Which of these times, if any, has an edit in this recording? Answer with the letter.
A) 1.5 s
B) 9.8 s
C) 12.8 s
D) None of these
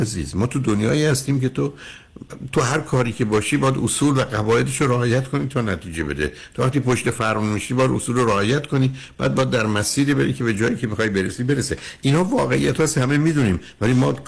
D